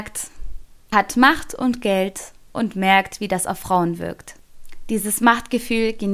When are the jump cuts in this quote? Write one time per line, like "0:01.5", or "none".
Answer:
0:00.9